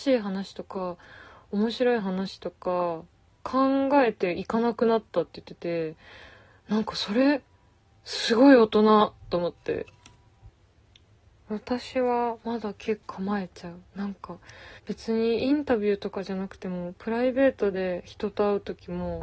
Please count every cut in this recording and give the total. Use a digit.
2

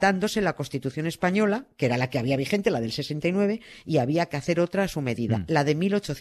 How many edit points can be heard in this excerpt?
0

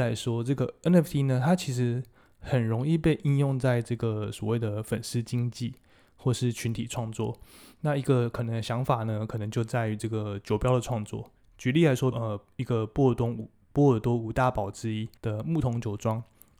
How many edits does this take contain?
2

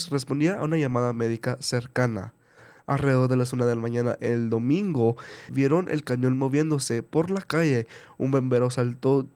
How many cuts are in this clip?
1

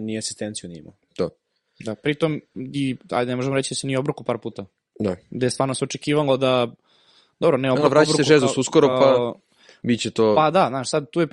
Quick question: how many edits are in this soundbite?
0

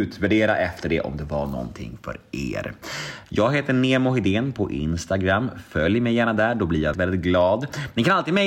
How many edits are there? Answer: 1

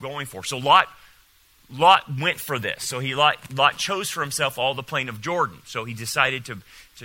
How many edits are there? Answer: 0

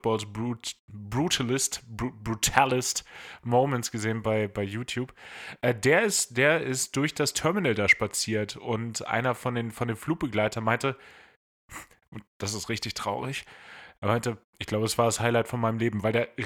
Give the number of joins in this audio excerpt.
0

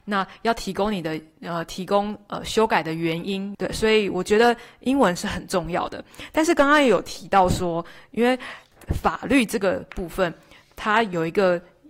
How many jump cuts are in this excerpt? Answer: 1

